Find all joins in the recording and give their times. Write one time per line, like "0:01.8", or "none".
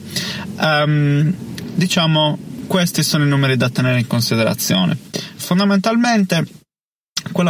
0:05.4